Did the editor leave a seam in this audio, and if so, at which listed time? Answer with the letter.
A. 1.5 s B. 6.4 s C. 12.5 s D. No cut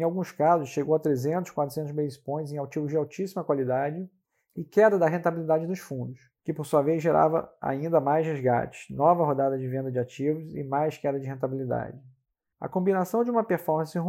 C